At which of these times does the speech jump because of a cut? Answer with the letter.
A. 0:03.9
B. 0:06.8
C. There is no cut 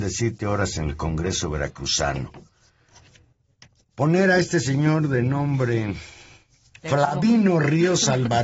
B